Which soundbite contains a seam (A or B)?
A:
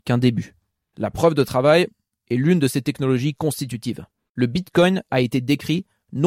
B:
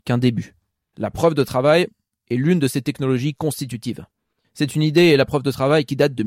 A